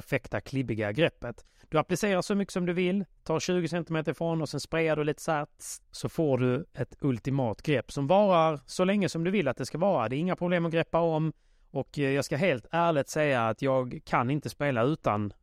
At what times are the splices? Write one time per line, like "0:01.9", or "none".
0:05.8